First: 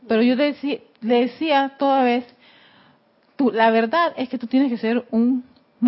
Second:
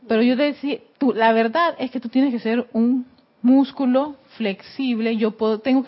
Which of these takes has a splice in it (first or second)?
second